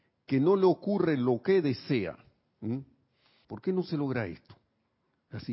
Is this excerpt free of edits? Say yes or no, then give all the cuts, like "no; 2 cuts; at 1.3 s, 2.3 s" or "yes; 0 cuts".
no; 1 cut; at 3.4 s